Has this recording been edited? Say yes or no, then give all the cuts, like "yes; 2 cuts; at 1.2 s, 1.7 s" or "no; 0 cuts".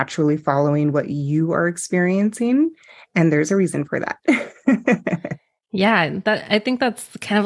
no; 0 cuts